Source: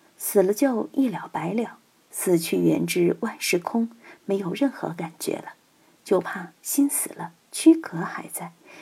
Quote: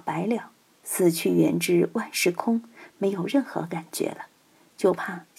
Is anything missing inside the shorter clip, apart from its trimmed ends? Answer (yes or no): no